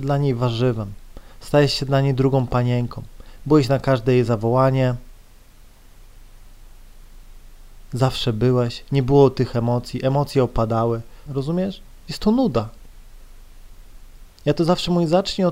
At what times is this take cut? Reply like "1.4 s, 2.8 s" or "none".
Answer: 11.3 s, 14.3 s